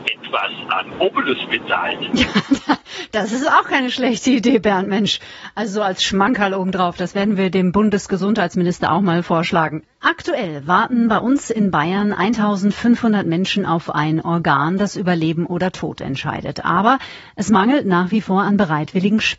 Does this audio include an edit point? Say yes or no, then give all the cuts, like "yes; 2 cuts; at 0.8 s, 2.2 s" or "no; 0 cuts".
no; 0 cuts